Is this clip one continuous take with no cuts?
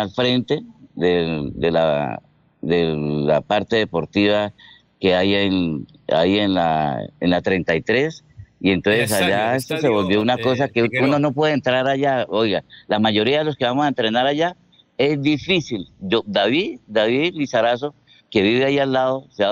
yes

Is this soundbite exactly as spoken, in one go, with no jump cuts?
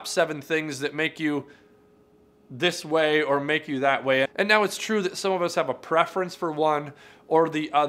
no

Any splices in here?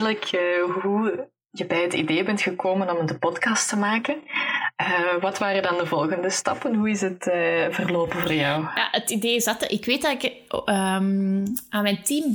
no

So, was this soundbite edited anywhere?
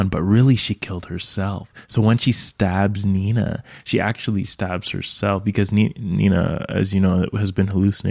no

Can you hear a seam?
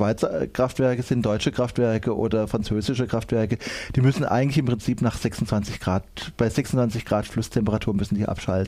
no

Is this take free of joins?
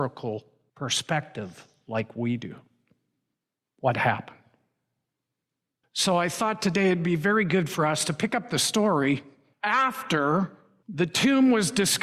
no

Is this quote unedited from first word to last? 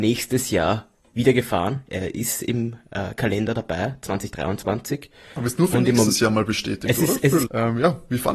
no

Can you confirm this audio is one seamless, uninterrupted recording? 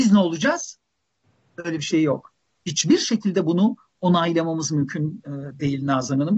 yes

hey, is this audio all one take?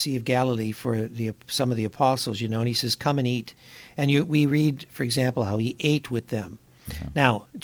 yes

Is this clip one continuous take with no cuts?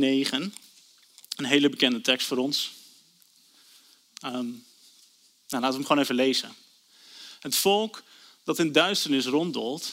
yes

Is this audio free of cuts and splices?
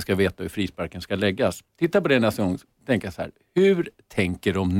yes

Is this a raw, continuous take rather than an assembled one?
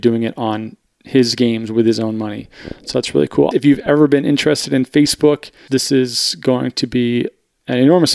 no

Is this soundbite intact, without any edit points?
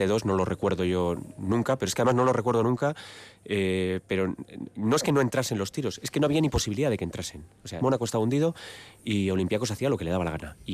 no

